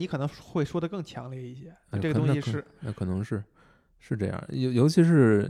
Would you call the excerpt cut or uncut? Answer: uncut